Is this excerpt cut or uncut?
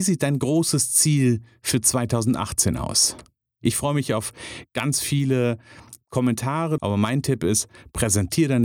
cut